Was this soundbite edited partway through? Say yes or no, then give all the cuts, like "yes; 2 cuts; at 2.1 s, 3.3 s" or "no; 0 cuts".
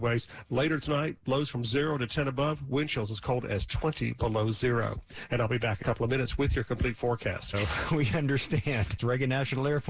yes; 3 cuts; at 5.8 s, 7.5 s, 9.0 s